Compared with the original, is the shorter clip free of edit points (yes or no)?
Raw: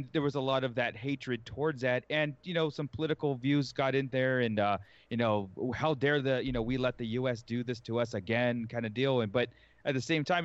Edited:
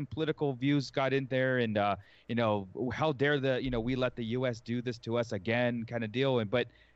yes